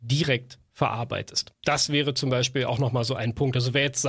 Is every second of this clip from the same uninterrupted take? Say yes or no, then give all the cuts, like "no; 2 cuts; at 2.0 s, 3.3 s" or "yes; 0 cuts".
yes; 0 cuts